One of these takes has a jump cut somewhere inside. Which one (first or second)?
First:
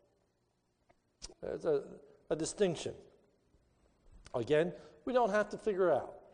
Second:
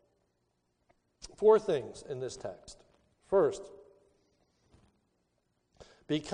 first